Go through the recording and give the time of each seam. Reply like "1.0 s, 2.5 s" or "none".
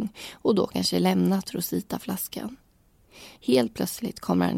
3.4 s